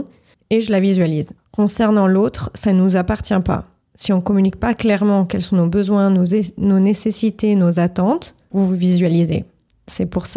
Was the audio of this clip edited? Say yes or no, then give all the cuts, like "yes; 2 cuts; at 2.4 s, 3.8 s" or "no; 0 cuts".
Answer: yes; 2 cuts; at 1.4 s, 8.5 s